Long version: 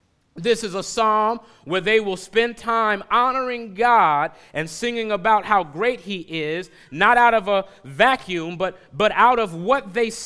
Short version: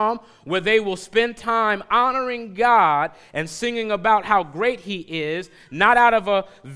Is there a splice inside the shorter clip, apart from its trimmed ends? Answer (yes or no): no